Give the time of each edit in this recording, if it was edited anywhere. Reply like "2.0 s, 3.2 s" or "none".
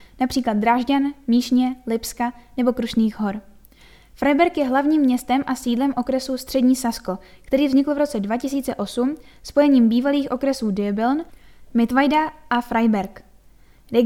none